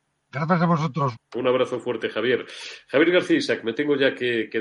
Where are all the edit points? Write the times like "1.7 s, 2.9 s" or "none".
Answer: 1.1 s